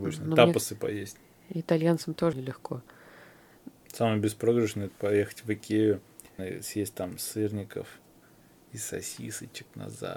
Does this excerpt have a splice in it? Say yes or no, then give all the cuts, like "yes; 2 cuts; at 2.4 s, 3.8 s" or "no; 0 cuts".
yes; 3 cuts; at 2.3 s, 3.8 s, 6.4 s